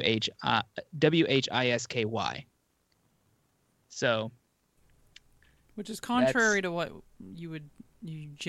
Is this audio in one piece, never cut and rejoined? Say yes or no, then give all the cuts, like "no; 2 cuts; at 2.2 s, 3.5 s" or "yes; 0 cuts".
yes; 0 cuts